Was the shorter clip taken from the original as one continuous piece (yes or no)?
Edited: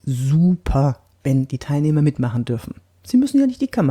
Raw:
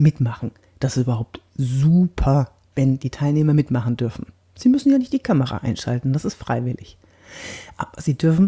yes